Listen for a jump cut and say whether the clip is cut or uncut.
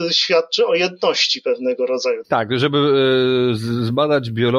cut